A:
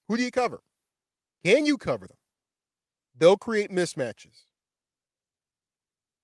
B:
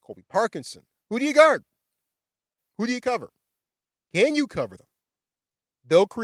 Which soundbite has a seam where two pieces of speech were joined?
B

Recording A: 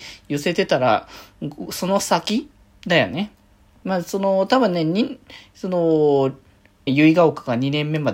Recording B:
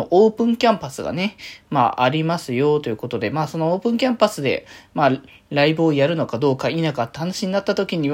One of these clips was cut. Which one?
A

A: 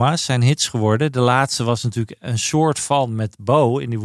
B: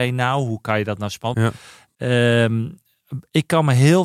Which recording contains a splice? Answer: B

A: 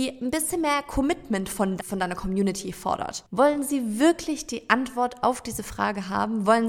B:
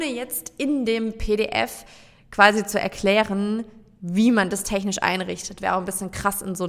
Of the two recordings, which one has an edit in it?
A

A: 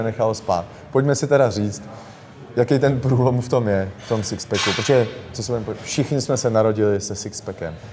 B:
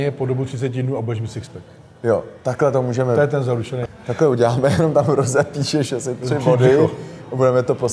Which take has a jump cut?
B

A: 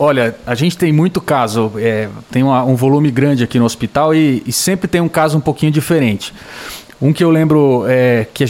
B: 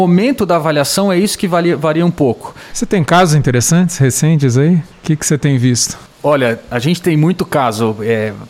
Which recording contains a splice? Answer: B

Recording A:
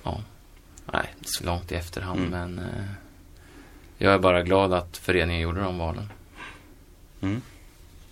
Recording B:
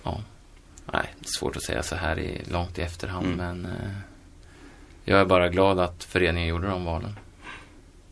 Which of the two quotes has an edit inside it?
A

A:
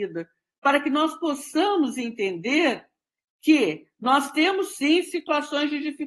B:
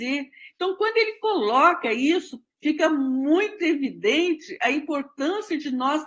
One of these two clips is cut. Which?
B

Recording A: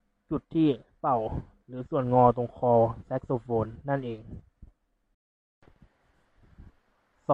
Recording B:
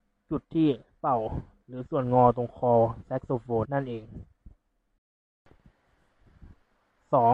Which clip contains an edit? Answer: B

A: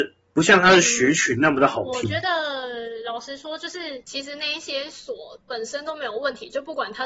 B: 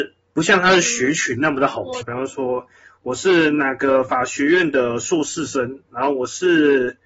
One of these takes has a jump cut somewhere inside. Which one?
B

